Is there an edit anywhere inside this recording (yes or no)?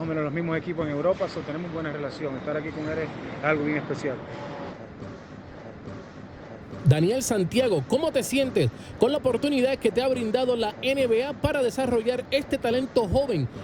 no